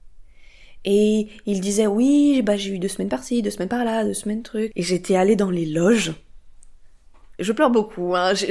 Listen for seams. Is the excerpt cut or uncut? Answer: cut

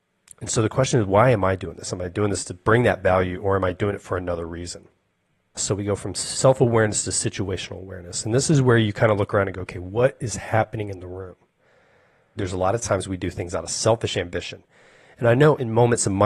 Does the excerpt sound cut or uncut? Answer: cut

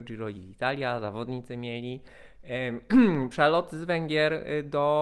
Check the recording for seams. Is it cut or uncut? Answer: uncut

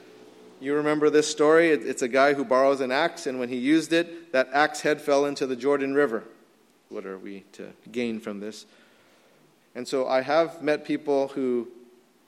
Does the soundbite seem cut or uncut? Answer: cut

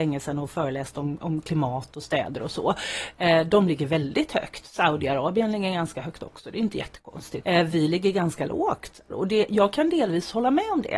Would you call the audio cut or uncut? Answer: cut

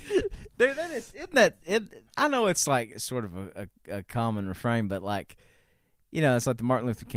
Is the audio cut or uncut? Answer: cut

